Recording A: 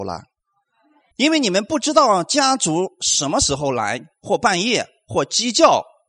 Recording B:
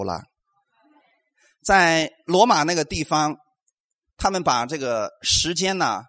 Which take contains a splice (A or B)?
A